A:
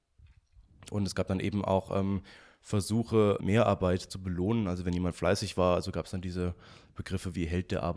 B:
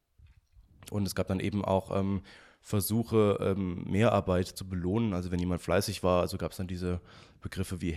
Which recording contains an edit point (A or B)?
A